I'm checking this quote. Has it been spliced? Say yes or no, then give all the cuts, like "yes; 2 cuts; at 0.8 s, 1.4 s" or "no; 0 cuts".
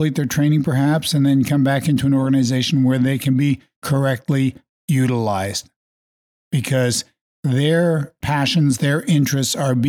no; 0 cuts